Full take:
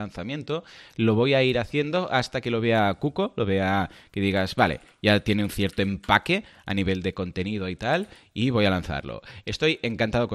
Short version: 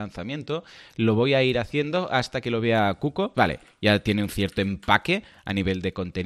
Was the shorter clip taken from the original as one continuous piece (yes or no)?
no